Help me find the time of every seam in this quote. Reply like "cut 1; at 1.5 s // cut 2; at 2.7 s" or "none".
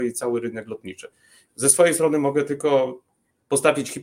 cut 1; at 1.5 s